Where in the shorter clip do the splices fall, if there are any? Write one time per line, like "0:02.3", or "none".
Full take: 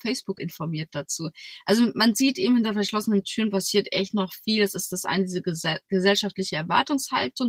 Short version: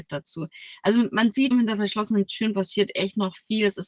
0:01.5